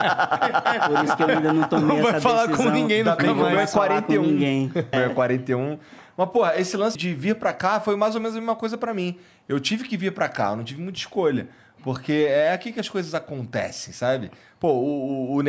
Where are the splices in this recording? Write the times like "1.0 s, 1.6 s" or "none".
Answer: 4.9 s, 7.0 s